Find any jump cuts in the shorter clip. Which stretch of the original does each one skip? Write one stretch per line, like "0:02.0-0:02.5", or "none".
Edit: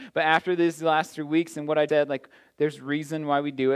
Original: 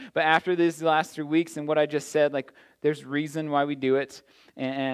0:01.9-0:02.1